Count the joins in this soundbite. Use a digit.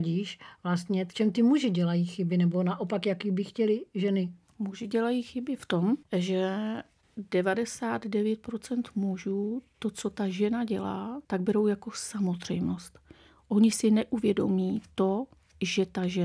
1